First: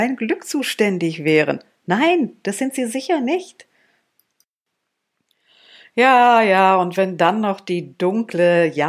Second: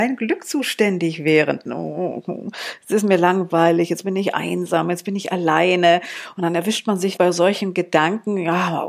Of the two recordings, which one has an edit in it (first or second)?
second